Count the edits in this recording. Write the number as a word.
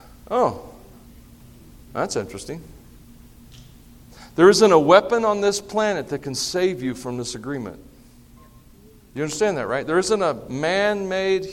zero